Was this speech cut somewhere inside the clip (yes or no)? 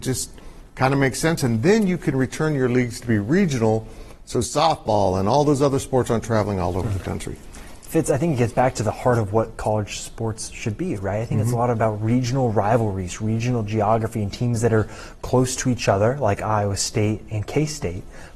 no